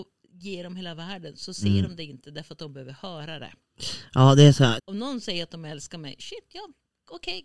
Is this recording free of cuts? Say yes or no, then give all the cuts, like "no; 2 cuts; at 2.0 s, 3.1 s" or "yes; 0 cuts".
no; 1 cut; at 4.8 s